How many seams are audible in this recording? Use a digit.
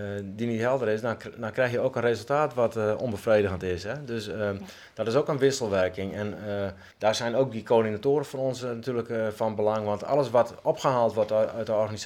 1